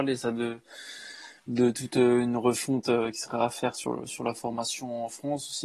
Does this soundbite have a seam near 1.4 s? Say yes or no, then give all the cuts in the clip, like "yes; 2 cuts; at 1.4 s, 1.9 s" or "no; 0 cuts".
yes; 1 cut; at 1.4 s